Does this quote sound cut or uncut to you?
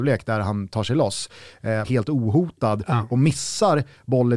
cut